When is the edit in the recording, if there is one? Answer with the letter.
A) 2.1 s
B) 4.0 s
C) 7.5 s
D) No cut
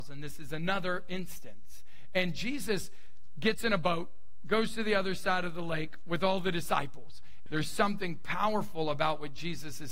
C